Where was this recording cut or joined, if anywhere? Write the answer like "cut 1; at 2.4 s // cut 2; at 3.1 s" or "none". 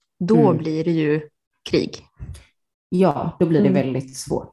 none